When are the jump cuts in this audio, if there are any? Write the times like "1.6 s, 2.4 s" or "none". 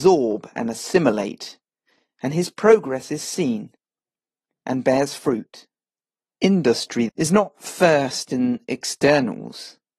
7.1 s